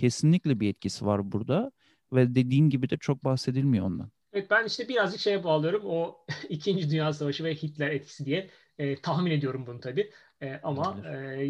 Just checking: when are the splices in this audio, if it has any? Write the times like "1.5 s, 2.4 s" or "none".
4.2 s